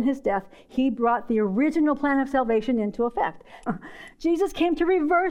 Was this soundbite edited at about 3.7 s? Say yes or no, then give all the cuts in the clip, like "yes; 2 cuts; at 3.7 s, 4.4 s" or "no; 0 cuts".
yes; 1 cut; at 3.7 s